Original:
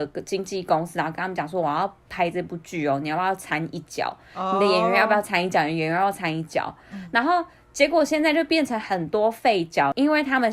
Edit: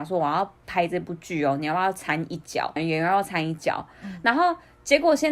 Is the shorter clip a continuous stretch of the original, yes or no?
no